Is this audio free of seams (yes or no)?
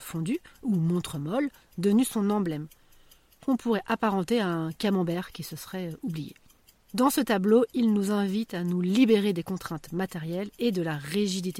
yes